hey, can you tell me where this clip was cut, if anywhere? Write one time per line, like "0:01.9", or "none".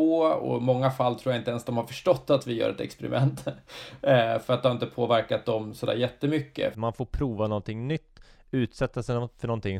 0:06.7